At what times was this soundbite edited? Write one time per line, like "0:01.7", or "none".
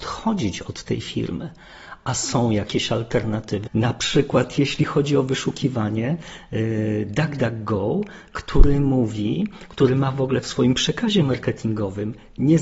0:03.7